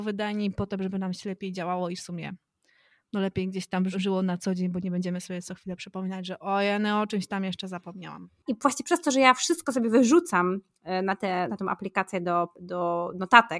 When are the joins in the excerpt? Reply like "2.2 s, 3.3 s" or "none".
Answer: 3.9 s, 8.5 s, 11.5 s